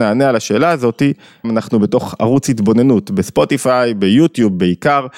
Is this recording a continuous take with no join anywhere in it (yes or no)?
no